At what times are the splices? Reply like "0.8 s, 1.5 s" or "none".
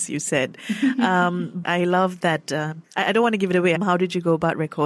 1.6 s, 3.7 s